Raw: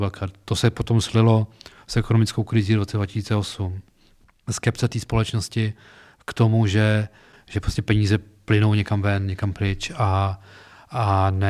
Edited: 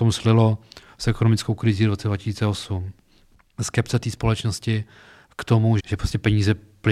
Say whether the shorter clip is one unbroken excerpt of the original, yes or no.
no